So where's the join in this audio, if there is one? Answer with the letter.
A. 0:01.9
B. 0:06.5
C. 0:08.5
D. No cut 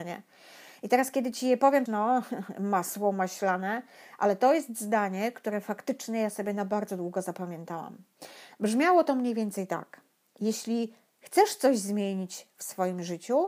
A